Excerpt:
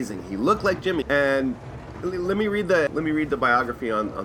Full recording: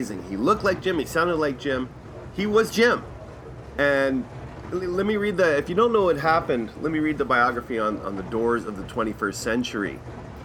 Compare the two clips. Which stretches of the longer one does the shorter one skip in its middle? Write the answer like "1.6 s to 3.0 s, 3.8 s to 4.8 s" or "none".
1.0 s to 3.7 s, 5.6 s to 6.7 s